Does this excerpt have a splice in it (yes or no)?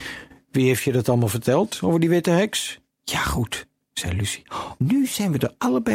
yes